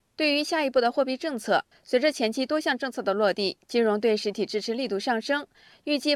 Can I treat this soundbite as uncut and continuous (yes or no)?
no